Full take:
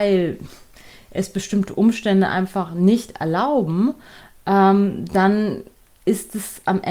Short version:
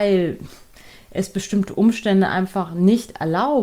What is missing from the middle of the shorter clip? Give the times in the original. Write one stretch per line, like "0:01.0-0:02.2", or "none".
none